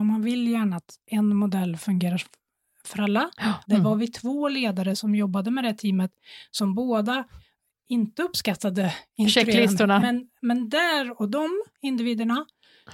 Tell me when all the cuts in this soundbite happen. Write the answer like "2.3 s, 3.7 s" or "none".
3.6 s, 10.0 s